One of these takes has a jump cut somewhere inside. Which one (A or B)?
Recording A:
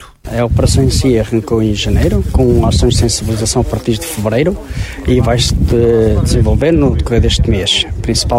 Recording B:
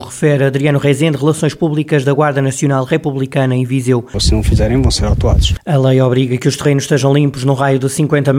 B